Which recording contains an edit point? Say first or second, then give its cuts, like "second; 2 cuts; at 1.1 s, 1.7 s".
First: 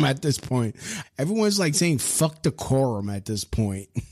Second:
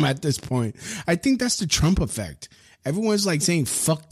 first; 1 cut; at 1.0 s